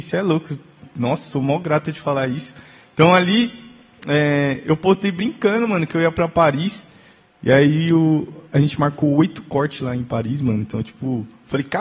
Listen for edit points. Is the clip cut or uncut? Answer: uncut